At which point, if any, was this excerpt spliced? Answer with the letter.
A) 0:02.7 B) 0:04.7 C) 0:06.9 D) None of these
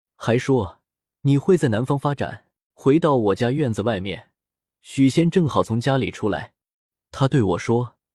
A